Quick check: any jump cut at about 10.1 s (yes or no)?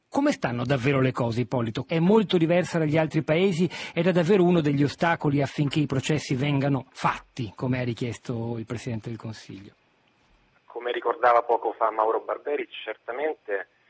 no